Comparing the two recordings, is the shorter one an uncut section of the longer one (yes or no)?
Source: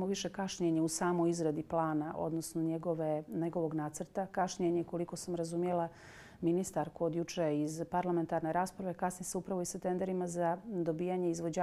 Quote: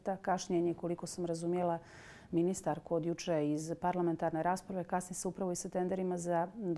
yes